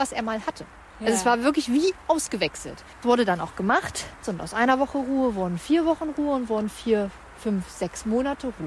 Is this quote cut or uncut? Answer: cut